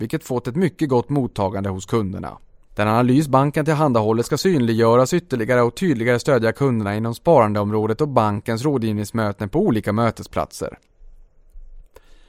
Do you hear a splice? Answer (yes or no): yes